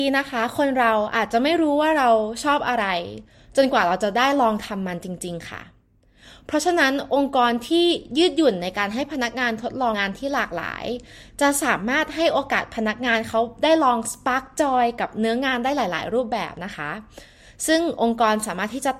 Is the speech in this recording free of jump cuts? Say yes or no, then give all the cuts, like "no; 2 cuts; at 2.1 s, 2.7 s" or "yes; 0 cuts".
no; 1 cut; at 9.9 s